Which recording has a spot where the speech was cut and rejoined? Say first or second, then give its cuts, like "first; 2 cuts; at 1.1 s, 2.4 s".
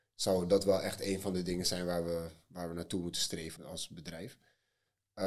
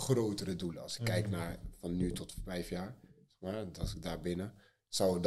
first; 1 cut; at 3.6 s